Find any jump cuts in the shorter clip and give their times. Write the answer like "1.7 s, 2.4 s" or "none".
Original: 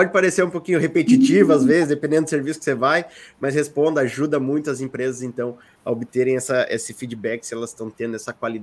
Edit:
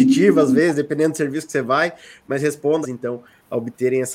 2.8 s